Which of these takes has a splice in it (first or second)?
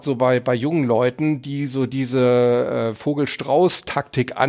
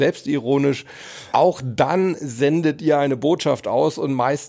second